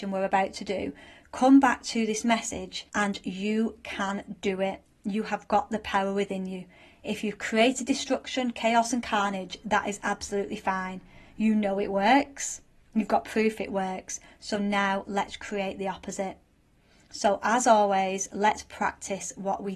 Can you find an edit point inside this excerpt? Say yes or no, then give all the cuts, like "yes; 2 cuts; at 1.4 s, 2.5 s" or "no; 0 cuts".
yes; 1 cut; at 2.9 s